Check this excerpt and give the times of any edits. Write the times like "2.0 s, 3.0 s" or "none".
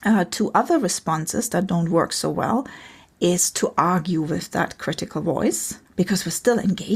5.9 s